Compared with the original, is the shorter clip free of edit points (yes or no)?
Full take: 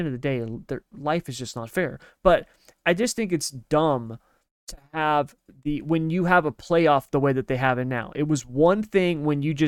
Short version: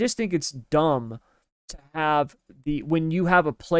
yes